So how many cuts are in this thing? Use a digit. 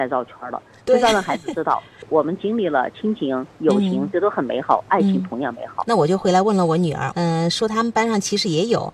2